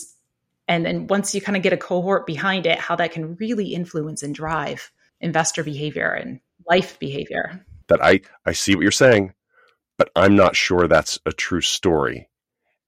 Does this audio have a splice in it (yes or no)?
yes